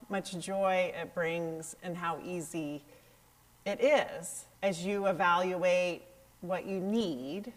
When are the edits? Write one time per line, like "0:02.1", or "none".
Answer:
0:04.5